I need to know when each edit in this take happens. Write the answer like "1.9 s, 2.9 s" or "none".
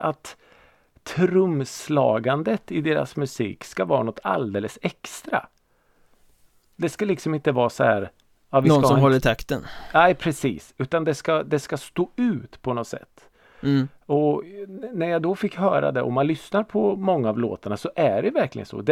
none